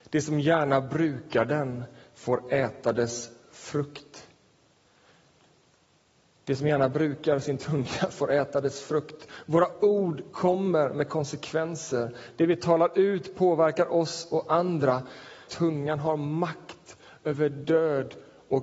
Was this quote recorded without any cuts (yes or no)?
no